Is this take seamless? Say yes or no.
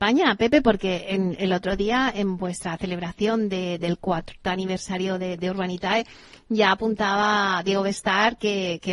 yes